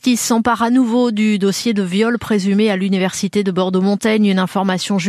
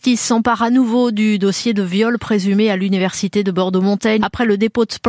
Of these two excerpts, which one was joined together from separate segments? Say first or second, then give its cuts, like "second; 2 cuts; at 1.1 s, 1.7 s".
second; 1 cut; at 4.2 s